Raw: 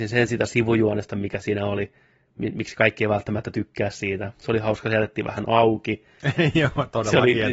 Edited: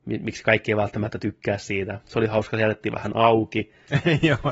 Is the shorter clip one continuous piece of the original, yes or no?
yes